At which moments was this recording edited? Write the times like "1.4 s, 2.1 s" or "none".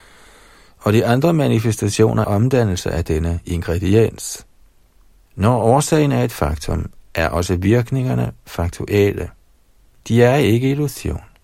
2.2 s, 5.3 s